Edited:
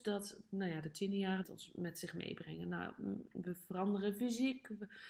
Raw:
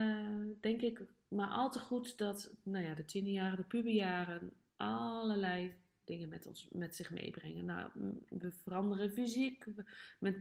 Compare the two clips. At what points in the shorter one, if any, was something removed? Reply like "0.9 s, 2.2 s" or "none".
1.4 s